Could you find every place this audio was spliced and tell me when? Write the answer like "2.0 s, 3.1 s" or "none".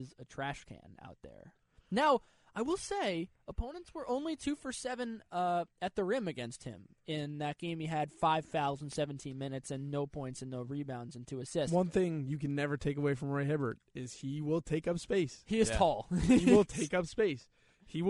none